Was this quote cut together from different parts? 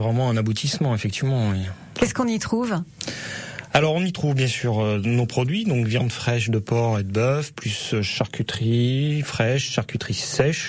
no; 0 cuts

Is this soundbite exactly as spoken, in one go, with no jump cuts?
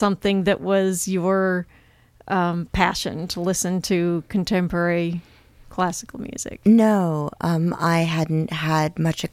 yes; 0 cuts

